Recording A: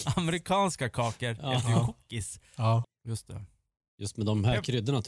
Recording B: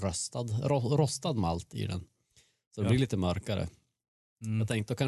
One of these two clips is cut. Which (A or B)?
A